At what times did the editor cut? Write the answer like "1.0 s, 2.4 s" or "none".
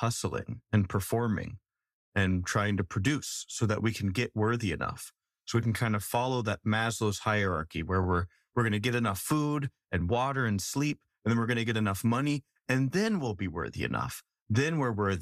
none